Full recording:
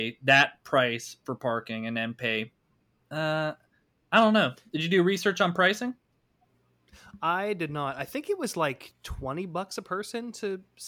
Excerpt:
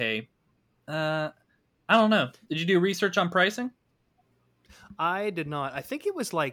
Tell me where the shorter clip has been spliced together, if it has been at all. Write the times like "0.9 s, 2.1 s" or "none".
none